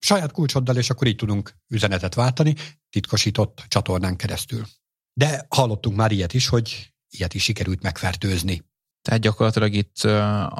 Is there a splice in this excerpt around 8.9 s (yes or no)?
yes